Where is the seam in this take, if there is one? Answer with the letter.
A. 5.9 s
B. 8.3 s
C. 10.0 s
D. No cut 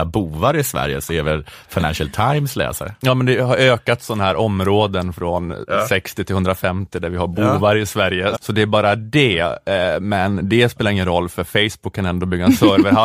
B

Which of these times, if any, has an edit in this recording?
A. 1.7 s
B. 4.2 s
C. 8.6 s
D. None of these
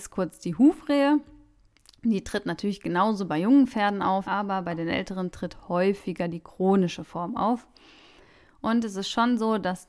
B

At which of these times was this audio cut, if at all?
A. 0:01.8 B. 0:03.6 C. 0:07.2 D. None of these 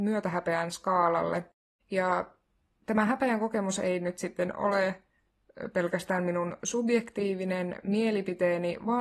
A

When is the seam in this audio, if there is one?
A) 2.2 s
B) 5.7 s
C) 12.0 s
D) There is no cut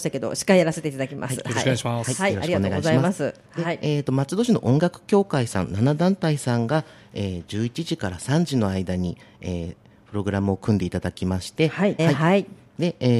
C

